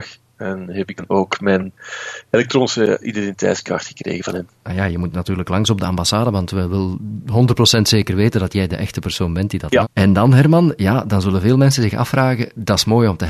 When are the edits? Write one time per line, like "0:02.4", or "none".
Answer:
0:09.8